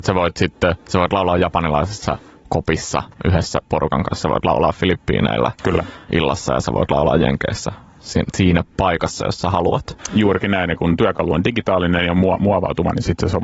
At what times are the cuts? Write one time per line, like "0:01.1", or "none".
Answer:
none

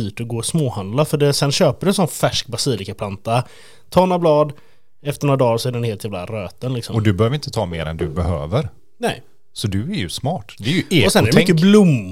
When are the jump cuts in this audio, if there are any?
none

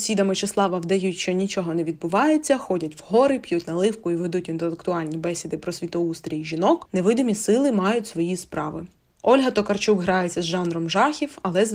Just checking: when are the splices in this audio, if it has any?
none

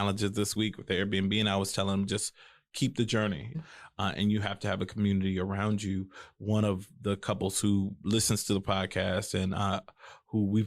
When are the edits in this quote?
0:03.5

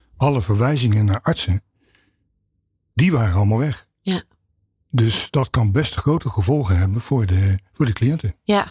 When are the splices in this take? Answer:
none

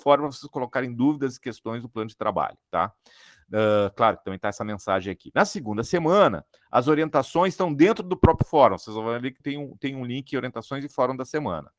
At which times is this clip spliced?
0:09.4

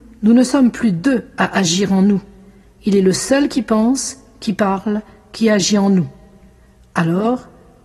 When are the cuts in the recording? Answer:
none

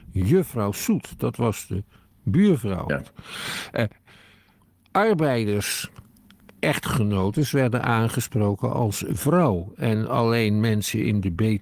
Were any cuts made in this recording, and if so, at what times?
0:02.9

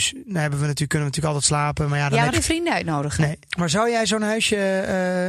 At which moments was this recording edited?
0:02.3
0:03.5

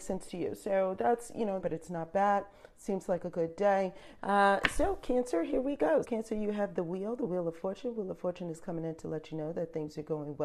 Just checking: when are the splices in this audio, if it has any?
0:01.6
0:04.2
0:06.0

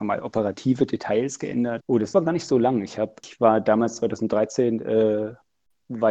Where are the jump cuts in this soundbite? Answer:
0:01.8
0:03.2

